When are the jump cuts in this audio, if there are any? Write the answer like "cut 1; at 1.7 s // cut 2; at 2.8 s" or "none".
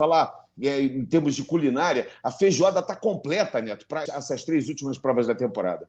cut 1; at 4.1 s